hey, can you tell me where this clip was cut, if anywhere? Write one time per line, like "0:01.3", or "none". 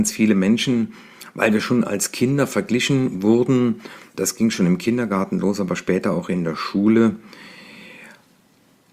none